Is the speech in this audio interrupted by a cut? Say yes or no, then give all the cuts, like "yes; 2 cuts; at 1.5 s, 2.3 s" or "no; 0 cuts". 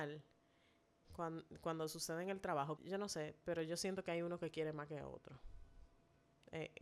yes; 2 cuts; at 1.0 s, 2.8 s